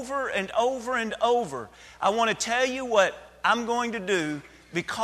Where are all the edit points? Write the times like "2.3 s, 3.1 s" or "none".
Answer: none